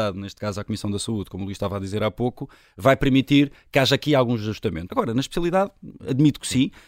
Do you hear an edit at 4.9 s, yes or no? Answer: yes